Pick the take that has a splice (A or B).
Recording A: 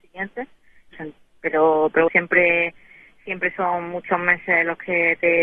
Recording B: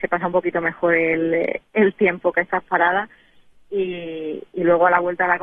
A